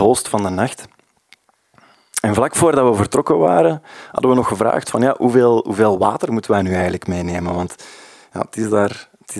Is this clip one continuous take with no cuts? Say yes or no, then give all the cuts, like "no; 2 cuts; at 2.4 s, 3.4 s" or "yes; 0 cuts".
yes; 0 cuts